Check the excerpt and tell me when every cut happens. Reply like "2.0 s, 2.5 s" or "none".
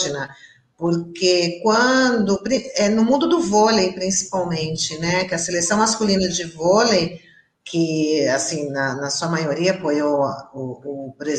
none